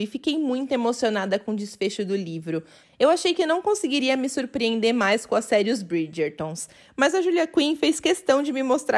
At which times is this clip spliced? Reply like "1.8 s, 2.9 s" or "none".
2.8 s

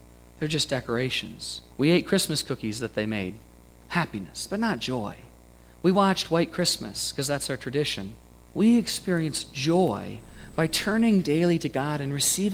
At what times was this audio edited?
1.7 s, 8.5 s

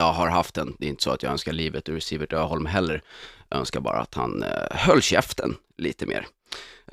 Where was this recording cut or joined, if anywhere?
none

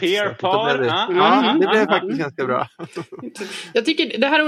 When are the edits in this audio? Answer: none

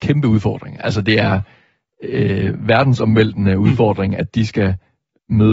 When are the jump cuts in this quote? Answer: none

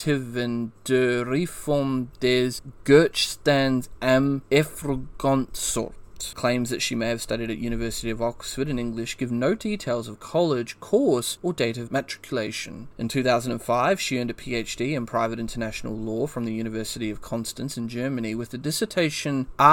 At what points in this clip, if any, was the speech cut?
6.3 s

